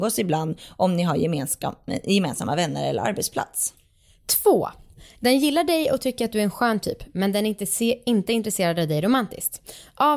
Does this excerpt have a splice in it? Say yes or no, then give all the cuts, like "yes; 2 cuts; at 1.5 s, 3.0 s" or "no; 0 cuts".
no; 0 cuts